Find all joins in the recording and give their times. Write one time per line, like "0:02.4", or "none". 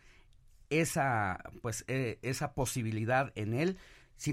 none